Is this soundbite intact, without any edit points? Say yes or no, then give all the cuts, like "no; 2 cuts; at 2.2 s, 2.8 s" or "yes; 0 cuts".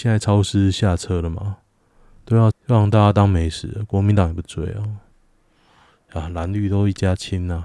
no; 1 cut; at 2.5 s